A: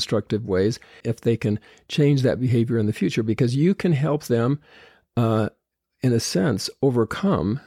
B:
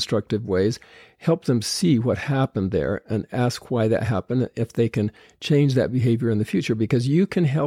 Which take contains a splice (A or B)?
A